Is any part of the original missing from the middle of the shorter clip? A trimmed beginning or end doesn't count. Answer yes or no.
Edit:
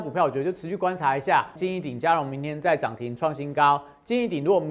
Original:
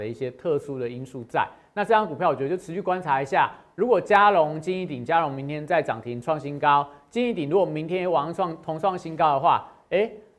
yes